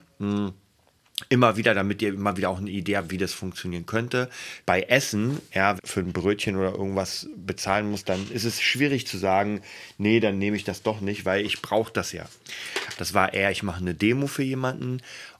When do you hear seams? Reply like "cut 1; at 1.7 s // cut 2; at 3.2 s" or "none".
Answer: cut 1; at 4.6 s // cut 2; at 5.8 s // cut 3; at 12.9 s